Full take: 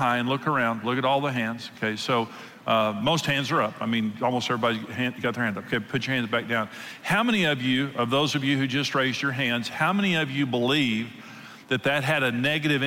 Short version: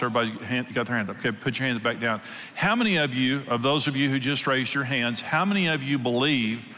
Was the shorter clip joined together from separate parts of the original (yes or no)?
no